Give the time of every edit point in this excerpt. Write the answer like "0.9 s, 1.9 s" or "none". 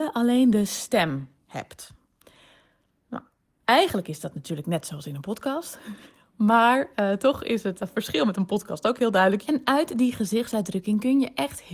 7.8 s, 9.4 s